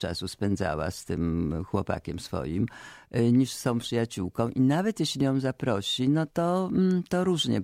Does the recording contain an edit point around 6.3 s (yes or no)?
no